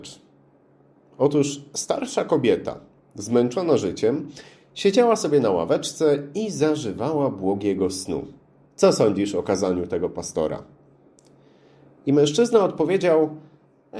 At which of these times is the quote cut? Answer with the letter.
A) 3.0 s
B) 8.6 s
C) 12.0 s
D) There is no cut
B